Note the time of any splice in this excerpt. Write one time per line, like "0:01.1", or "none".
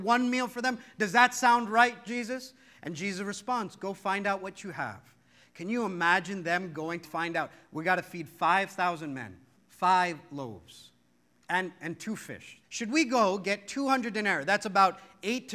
0:07.0
0:09.5
0:12.6